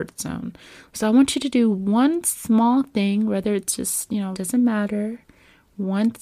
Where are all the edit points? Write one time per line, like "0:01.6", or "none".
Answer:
0:04.3

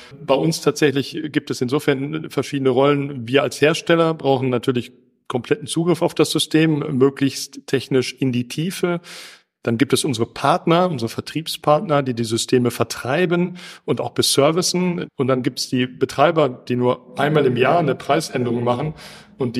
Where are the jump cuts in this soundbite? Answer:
0:15.1
0:16.6

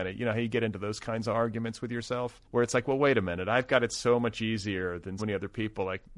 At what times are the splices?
0:02.4
0:05.2

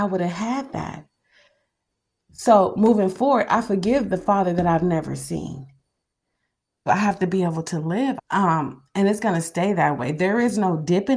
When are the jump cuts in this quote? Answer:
0:06.9
0:08.2

